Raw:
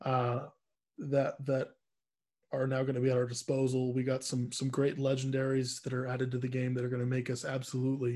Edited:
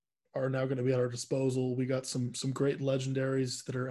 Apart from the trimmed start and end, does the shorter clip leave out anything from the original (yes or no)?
no